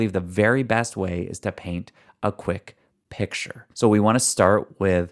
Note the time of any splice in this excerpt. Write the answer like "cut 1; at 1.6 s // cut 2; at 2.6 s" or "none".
cut 1; at 3.7 s